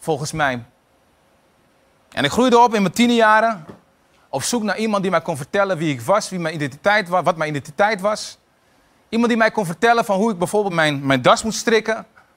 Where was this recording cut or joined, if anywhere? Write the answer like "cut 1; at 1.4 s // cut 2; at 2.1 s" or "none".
cut 1; at 10.7 s